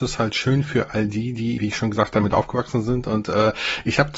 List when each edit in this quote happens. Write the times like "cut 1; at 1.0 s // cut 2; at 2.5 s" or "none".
cut 1; at 1.6 s